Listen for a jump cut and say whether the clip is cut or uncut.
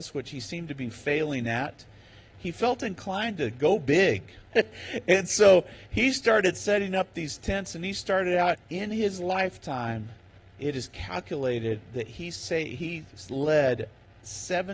cut